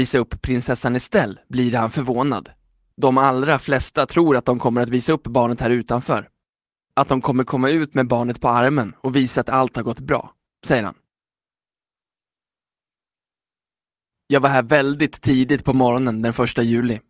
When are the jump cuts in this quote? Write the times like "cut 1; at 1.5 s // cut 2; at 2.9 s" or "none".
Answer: cut 1; at 2.9 s // cut 2; at 14.1 s